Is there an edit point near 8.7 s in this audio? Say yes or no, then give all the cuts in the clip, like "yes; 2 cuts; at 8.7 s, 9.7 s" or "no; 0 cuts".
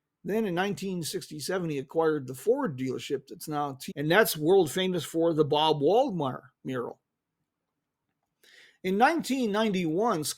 no; 1 cut; at 3.9 s